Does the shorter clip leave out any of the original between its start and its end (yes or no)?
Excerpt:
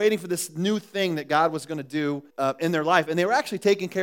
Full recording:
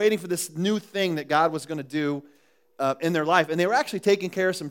yes